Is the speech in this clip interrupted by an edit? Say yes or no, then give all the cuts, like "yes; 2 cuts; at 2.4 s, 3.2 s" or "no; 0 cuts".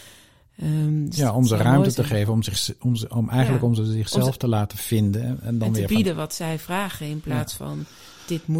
no; 0 cuts